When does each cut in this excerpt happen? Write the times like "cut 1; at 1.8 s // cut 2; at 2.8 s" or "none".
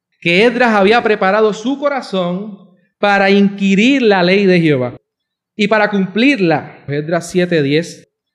cut 1; at 6.9 s